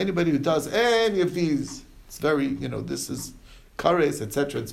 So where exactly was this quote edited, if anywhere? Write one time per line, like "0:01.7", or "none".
none

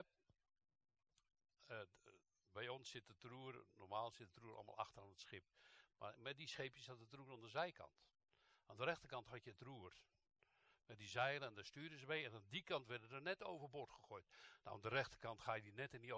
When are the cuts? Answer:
none

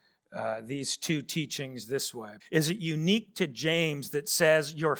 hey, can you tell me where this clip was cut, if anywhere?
0:02.4

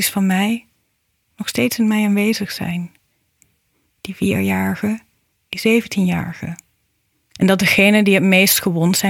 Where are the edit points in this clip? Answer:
0:05.3

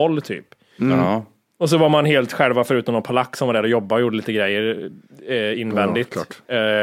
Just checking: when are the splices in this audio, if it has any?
none

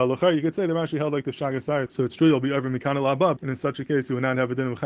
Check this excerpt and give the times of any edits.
0:01.9
0:03.4

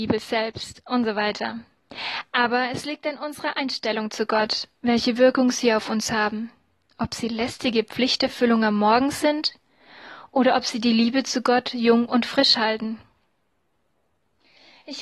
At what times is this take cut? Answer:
none

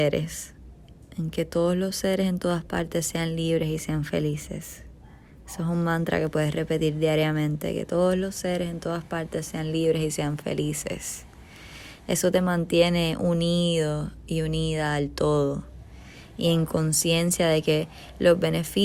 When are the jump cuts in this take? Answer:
none

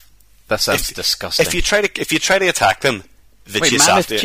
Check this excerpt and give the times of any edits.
none

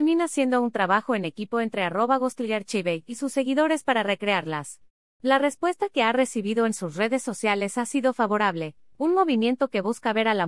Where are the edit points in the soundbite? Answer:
0:05.2
0:08.9

